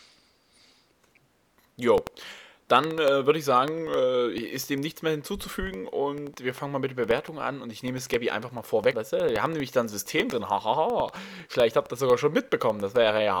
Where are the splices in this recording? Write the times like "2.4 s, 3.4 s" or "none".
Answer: 8.9 s